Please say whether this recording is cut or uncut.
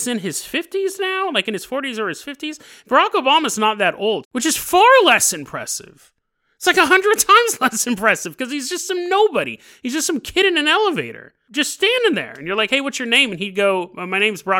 cut